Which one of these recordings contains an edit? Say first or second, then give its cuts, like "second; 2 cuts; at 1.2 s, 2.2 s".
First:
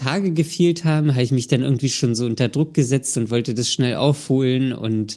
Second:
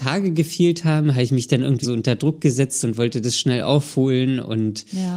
second; 1 cut; at 1.8 s